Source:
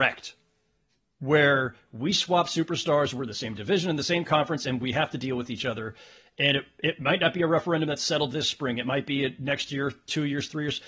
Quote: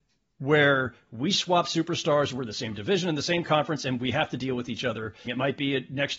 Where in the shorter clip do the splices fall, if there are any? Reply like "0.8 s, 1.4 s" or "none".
5.3 s